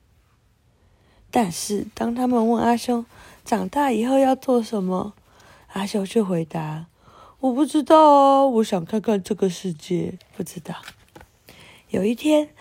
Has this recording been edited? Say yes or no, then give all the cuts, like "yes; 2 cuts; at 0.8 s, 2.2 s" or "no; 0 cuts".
yes; 1 cut; at 10.2 s